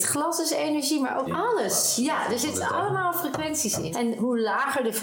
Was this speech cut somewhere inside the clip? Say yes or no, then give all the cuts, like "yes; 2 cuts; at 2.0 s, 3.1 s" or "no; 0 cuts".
yes; 2 cuts; at 1.2 s, 3.9 s